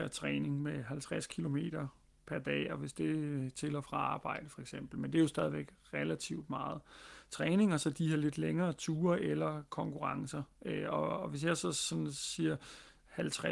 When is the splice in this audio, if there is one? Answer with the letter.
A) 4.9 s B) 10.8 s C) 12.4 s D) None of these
D